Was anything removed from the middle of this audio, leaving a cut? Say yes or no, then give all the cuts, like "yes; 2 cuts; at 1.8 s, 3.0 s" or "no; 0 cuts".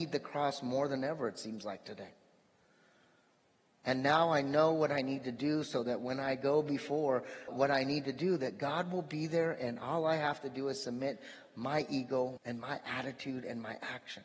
yes; 2 cuts; at 7.5 s, 12.4 s